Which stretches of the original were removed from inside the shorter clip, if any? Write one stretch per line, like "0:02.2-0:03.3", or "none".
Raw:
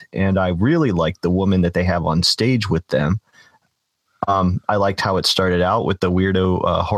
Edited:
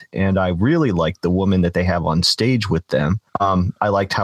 0:03.3-0:04.2